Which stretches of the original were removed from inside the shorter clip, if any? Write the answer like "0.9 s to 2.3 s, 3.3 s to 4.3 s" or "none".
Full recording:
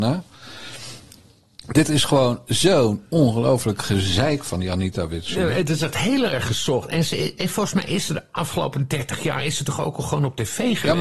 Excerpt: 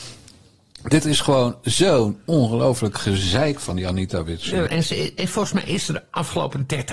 5.5 s to 6.9 s